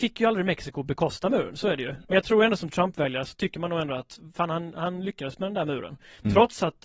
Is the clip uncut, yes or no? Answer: no